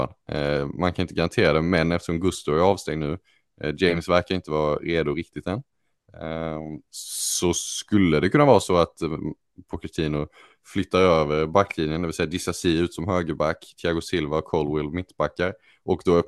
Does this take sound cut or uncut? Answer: uncut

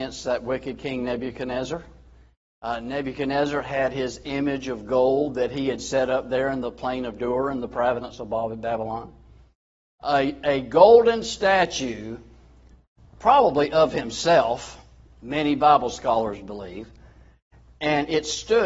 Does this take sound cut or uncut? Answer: uncut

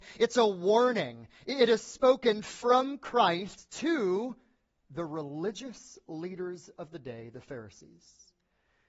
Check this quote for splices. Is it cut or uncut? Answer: uncut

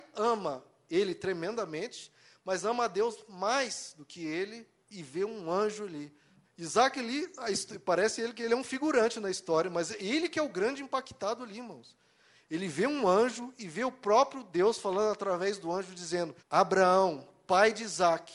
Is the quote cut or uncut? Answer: cut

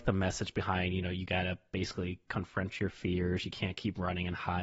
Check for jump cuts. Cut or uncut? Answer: uncut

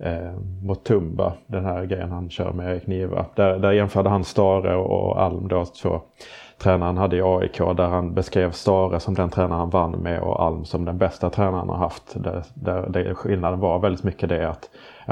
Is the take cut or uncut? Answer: uncut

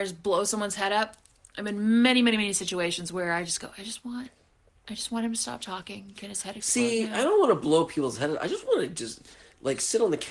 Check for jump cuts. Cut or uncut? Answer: uncut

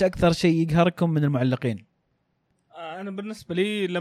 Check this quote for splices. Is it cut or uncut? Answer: uncut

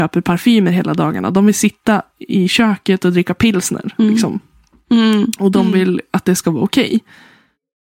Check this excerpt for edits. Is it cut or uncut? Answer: uncut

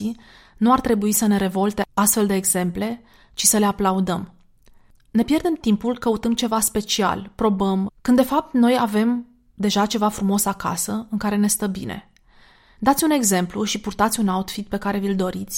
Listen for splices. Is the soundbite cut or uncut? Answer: cut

